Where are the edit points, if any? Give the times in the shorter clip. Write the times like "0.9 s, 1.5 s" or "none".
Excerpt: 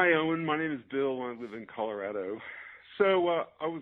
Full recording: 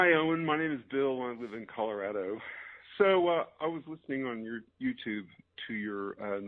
none